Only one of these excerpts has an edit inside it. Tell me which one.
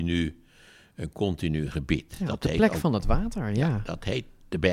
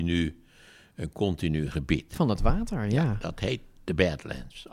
second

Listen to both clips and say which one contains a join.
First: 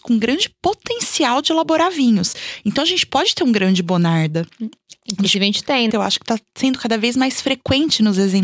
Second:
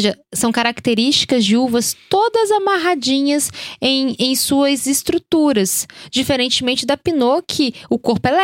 first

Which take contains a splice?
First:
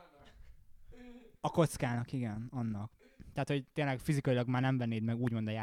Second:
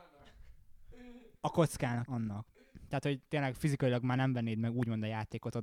second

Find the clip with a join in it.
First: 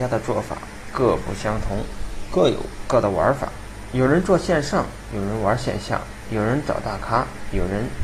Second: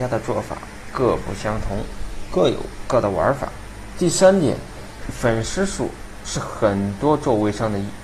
second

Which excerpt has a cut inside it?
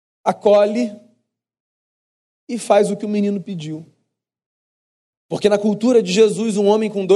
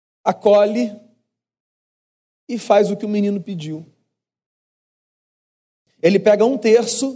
first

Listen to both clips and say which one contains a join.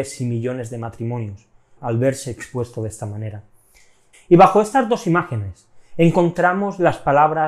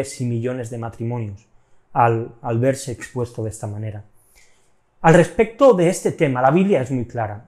first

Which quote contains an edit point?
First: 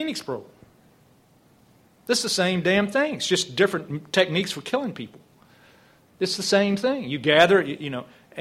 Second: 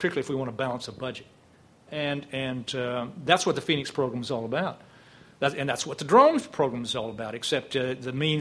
second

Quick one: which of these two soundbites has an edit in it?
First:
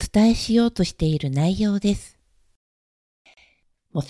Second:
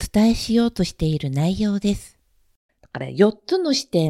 second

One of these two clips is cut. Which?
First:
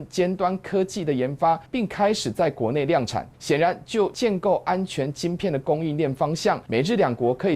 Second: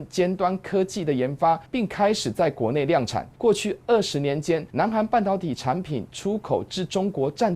second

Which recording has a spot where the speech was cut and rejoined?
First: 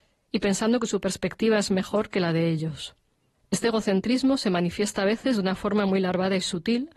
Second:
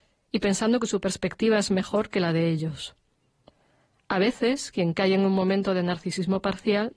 first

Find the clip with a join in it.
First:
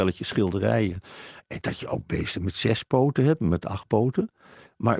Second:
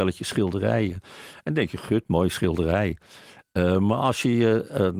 first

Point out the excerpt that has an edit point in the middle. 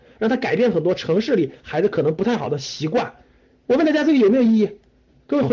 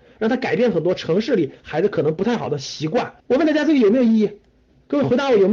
second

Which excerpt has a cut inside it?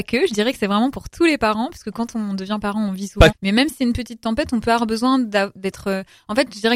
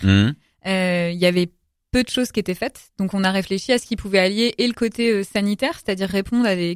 first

